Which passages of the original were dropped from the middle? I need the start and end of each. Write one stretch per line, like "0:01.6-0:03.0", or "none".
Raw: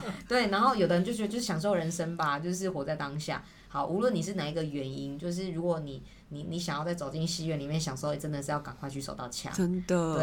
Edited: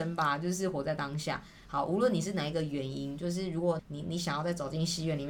0:05.8-0:06.2